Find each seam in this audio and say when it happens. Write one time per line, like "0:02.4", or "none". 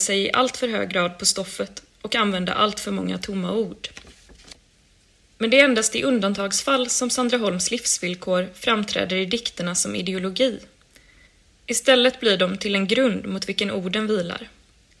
none